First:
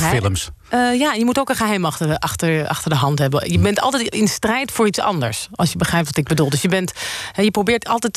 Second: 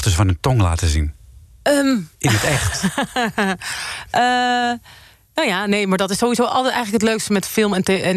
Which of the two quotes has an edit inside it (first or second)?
second